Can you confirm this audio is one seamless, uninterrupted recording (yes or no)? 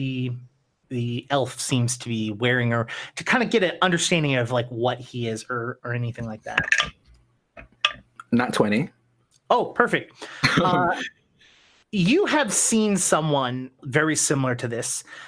no